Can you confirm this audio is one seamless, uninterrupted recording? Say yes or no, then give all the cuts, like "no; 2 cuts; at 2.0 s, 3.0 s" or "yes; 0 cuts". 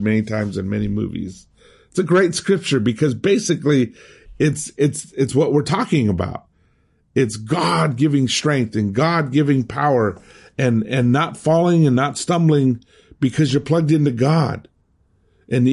yes; 0 cuts